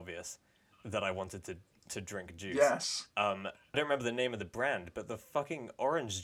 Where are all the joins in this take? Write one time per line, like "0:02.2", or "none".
0:03.7